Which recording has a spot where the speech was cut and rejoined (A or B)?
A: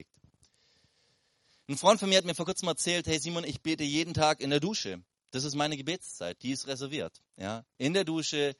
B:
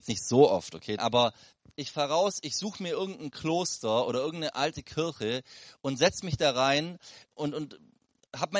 B